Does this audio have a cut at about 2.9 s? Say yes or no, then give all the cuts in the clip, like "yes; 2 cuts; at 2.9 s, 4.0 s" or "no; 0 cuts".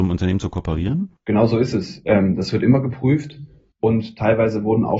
no; 1 cut; at 1.2 s